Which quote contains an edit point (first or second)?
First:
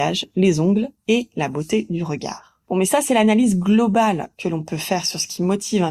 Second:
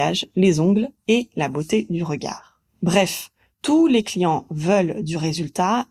first